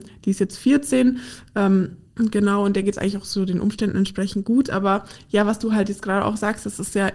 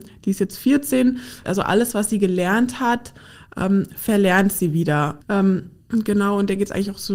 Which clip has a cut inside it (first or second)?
second